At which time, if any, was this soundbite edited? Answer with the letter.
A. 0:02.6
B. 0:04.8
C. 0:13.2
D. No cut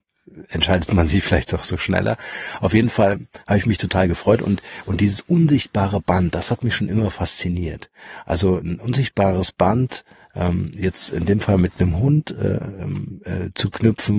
D